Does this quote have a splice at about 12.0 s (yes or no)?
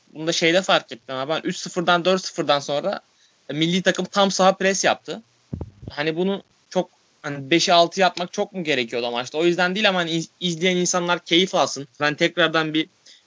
yes